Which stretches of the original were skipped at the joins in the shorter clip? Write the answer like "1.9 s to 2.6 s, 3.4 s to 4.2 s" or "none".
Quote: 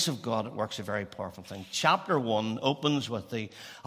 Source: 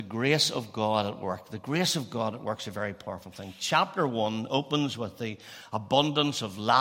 none